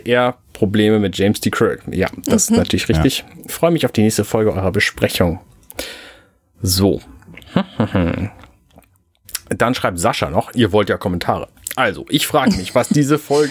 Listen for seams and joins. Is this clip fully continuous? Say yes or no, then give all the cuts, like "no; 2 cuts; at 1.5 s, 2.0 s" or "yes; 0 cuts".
no; 1 cut; at 3.5 s